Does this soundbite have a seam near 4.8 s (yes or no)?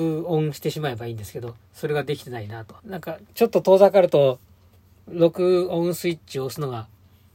no